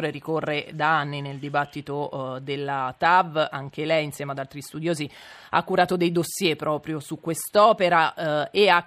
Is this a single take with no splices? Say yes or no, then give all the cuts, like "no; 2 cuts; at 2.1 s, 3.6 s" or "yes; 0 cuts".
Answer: yes; 0 cuts